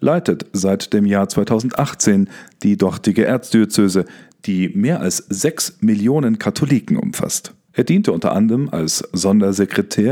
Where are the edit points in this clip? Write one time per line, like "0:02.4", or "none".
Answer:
0:07.7